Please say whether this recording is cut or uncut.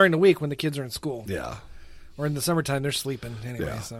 uncut